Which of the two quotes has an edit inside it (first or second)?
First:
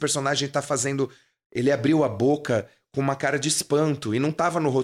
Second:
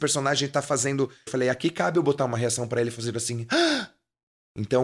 second